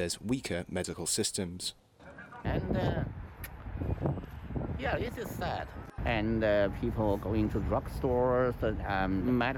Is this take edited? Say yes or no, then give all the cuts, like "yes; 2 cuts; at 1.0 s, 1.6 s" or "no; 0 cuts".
yes; 2 cuts; at 2.4 s, 6.0 s